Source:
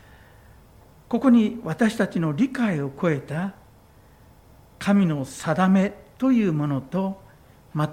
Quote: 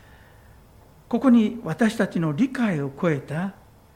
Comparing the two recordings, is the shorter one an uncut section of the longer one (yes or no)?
yes